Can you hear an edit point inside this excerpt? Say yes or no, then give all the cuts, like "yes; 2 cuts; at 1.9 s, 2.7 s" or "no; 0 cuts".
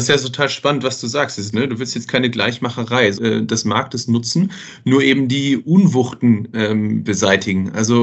yes; 2 cuts; at 1.5 s, 3.1 s